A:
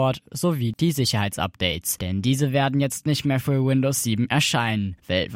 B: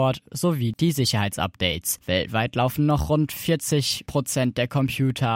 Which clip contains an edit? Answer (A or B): B